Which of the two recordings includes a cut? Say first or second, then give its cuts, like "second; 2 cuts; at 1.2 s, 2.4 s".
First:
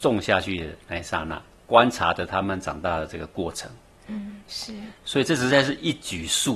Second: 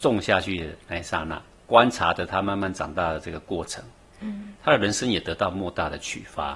first; 2 cuts; at 2.4 s, 4.4 s